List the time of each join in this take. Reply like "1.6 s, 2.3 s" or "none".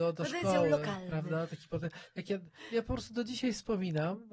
none